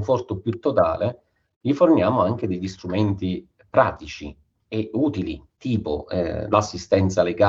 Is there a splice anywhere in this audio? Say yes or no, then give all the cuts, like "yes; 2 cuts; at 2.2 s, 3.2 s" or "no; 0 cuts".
no; 0 cuts